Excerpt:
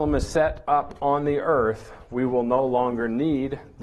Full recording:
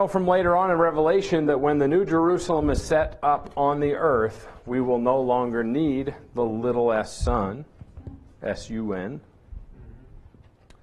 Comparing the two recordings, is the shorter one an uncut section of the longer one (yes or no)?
yes